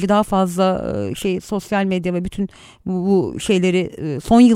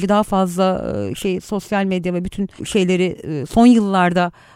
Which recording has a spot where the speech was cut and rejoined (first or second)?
second